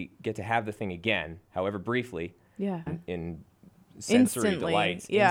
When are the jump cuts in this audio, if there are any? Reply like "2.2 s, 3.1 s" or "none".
2.9 s